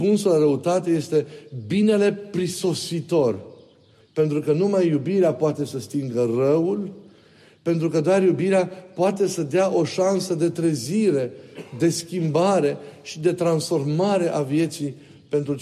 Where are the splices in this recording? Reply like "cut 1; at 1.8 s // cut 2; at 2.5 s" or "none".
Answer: cut 1; at 4.0 s